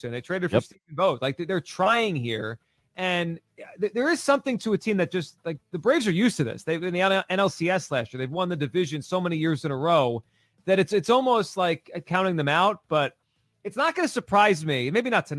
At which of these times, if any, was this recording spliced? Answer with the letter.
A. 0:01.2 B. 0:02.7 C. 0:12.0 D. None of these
C